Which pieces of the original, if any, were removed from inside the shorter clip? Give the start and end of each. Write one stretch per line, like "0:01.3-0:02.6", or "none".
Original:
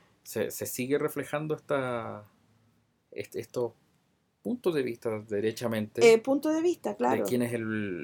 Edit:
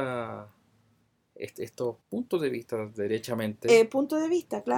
0:03.8-0:04.3